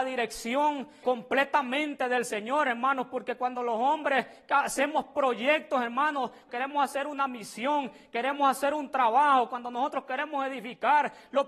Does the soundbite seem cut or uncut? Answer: cut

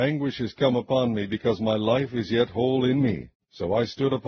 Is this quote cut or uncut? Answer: uncut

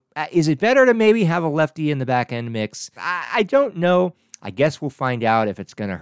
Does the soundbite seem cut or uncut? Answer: cut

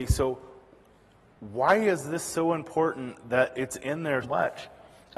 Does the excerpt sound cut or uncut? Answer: cut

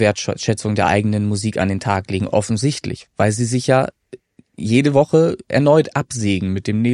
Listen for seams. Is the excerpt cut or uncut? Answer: uncut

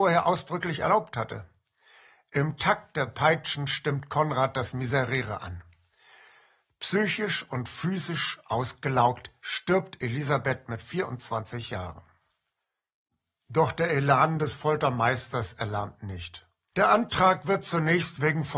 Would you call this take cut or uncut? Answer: cut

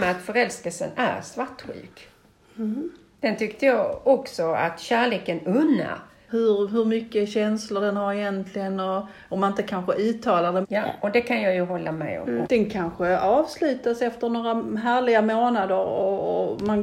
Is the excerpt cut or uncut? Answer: cut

